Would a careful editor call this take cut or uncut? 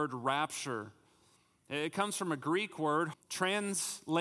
cut